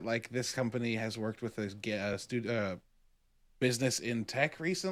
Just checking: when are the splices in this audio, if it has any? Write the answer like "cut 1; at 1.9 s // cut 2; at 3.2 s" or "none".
none